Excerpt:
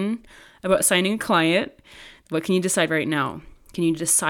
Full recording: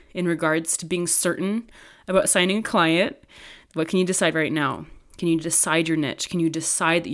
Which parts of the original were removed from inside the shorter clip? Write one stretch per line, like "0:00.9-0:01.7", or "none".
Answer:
none